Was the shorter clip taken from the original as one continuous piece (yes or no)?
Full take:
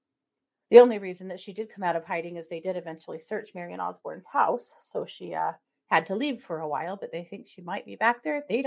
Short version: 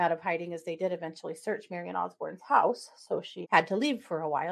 no